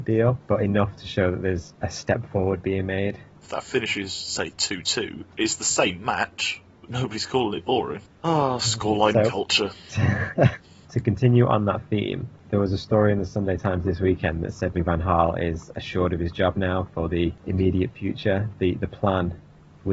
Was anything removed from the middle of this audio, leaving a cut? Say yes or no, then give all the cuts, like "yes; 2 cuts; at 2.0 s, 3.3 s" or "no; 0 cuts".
yes; 2 cuts; at 3.4 s, 14.7 s